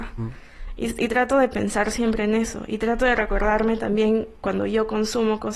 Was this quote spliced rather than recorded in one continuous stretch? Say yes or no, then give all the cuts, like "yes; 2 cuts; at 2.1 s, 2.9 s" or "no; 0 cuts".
no; 0 cuts